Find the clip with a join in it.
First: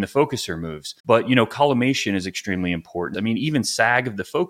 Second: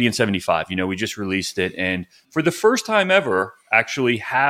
first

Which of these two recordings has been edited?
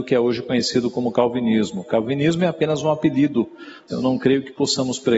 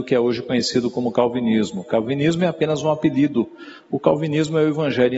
first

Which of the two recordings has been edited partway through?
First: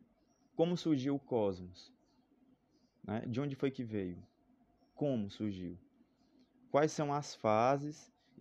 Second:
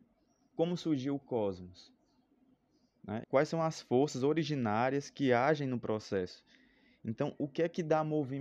second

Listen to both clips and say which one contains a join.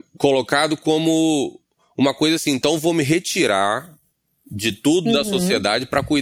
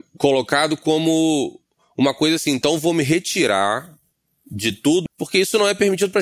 second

